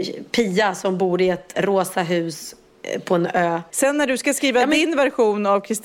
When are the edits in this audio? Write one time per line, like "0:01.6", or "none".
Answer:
0:01.5
0:03.7